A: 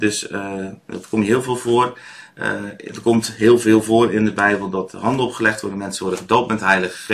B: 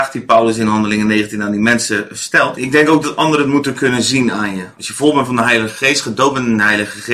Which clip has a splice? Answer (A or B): B